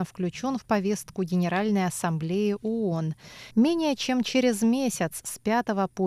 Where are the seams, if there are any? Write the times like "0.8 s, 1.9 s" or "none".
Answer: 3.5 s